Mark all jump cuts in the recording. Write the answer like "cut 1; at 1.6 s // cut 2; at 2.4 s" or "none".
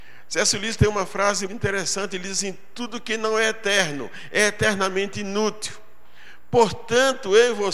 cut 1; at 1.5 s